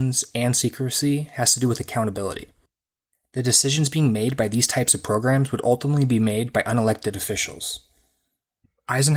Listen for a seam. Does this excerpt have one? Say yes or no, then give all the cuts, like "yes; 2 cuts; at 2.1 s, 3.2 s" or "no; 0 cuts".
no; 0 cuts